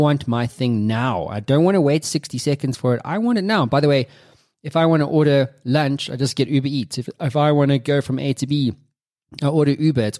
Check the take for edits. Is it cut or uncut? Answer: uncut